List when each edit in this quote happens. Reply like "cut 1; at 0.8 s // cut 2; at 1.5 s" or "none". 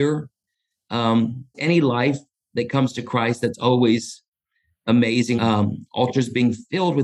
cut 1; at 1.5 s // cut 2; at 5.4 s